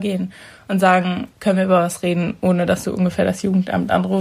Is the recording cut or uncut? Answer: cut